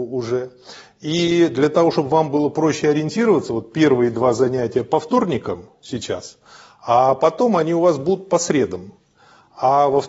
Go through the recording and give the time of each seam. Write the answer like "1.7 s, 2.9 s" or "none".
none